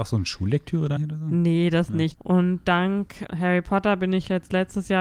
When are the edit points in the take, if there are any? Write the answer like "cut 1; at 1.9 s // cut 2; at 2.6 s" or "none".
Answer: cut 1; at 1.0 s // cut 2; at 2.1 s // cut 3; at 3.3 s